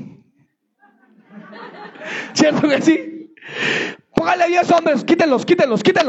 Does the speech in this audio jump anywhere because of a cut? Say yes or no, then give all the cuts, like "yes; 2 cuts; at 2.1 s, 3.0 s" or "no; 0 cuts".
no; 0 cuts